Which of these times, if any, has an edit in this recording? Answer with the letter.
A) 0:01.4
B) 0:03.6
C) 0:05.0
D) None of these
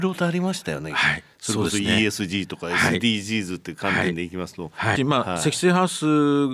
C